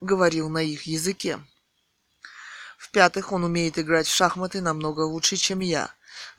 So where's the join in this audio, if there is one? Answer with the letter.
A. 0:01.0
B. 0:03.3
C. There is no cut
C